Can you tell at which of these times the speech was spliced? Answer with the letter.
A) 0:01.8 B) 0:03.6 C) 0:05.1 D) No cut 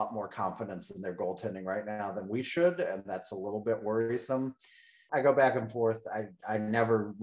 C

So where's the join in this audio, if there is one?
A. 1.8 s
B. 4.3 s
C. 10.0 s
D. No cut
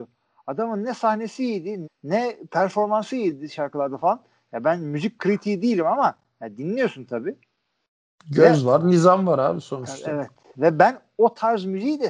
A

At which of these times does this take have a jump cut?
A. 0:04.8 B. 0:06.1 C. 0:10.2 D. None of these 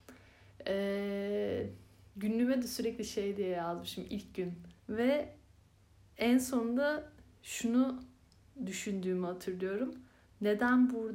A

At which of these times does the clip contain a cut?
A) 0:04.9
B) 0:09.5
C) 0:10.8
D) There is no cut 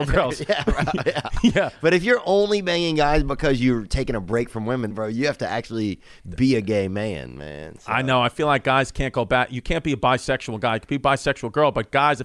A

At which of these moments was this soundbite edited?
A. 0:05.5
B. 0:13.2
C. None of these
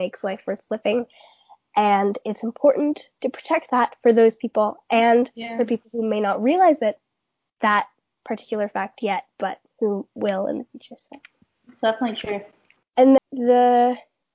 B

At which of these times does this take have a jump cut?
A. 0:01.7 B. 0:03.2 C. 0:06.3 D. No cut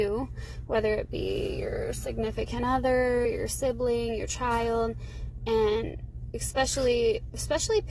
B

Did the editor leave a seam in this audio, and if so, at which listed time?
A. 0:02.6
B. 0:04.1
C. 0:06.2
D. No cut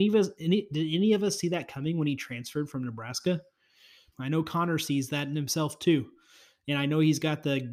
B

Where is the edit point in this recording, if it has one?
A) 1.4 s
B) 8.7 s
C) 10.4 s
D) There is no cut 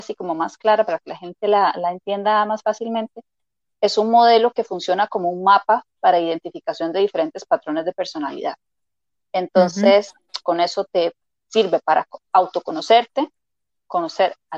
C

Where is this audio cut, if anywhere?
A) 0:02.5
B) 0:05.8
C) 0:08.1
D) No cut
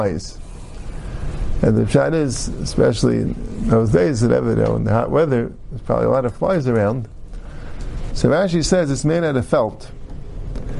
C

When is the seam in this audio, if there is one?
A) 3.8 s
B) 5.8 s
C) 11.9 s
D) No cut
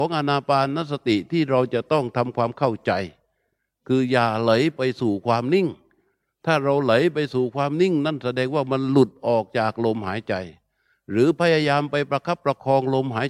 D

